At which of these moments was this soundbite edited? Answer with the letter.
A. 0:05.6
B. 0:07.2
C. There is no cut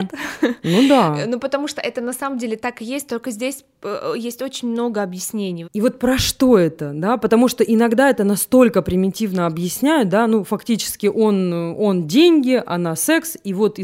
A